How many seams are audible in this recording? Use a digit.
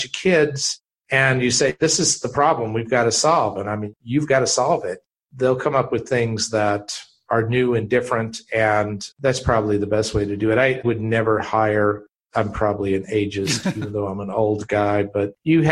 1